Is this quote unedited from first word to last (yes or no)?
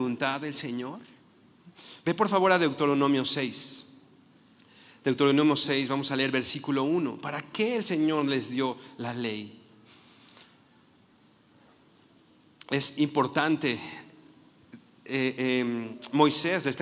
yes